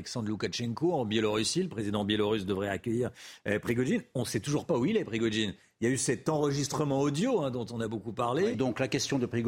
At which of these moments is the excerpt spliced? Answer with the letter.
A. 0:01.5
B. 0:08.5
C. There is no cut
B